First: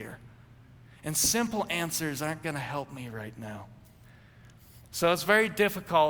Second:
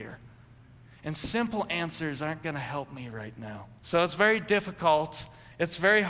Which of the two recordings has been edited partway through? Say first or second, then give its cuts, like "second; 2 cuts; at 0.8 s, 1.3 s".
second; 1 cut; at 3.8 s